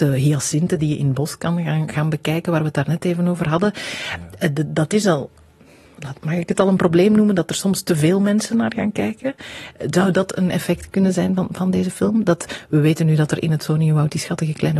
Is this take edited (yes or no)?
no